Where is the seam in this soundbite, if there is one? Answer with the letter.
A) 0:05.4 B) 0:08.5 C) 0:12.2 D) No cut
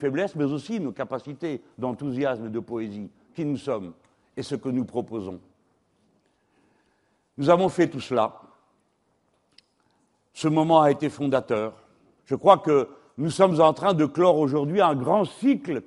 C